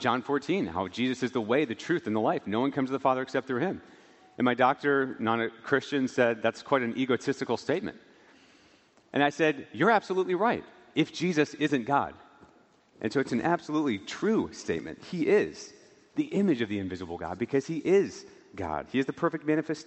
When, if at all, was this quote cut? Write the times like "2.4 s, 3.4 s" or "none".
12.9 s